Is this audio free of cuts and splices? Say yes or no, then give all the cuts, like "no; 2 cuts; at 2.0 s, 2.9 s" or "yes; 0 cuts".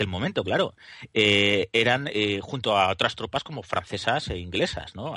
yes; 0 cuts